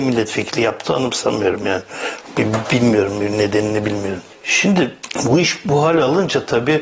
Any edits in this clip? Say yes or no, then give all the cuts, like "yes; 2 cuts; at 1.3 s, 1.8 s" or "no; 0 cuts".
no; 0 cuts